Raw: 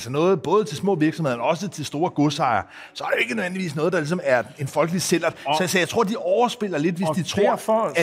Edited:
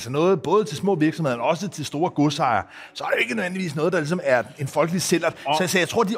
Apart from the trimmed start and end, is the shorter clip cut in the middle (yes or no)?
no